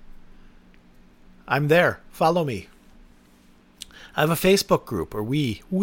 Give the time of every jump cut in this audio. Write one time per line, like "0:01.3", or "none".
none